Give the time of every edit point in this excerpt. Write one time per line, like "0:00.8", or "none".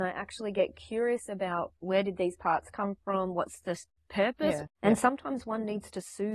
0:04.7